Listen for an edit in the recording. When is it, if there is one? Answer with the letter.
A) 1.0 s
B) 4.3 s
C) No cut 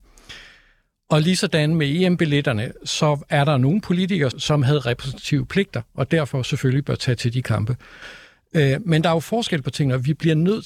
B